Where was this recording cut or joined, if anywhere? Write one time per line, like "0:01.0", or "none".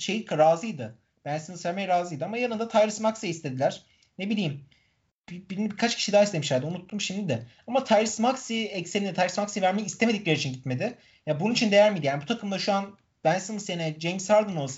0:05.1